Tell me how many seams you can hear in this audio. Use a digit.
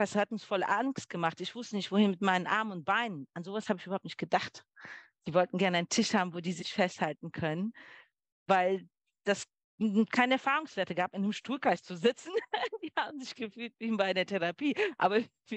0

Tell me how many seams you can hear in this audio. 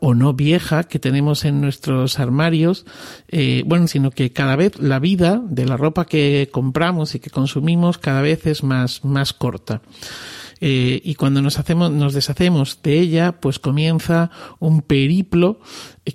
1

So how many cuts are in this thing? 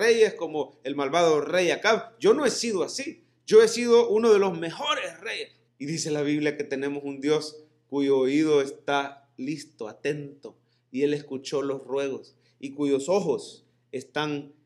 1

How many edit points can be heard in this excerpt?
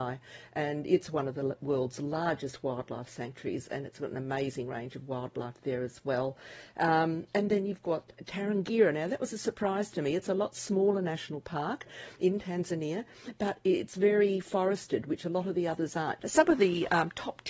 1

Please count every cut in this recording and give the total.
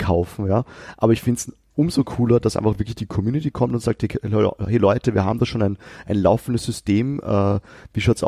0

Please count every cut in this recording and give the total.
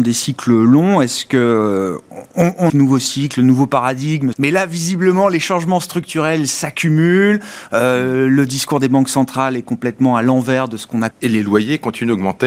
3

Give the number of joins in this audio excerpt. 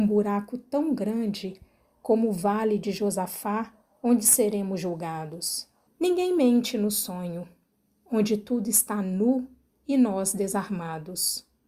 1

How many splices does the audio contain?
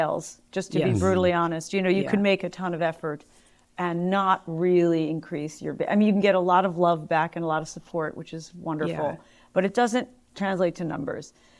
0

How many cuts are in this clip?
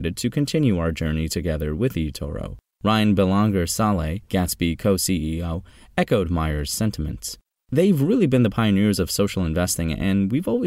0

